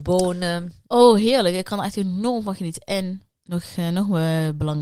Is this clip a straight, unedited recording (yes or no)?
yes